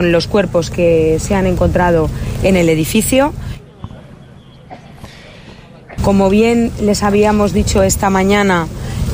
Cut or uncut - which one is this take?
cut